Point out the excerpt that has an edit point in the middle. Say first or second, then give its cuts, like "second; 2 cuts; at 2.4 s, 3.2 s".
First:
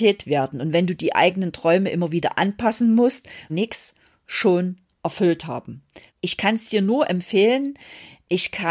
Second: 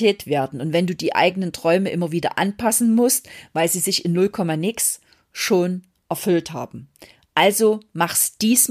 first; 2 cuts; at 3.5 s, 6.1 s